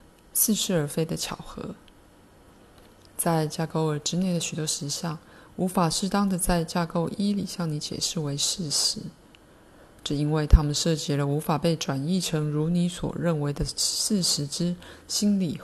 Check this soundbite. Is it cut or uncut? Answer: uncut